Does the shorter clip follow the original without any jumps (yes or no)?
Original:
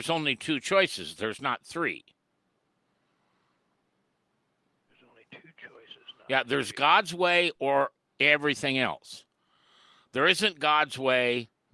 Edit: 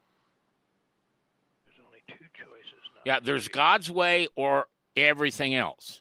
yes